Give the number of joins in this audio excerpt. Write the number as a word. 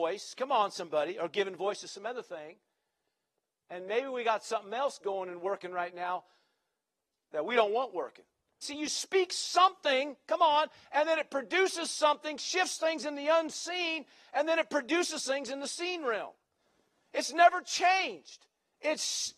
one